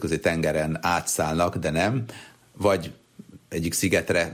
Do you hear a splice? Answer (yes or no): no